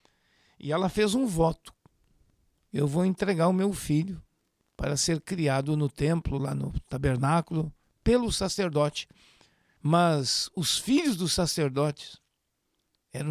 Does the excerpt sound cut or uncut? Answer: cut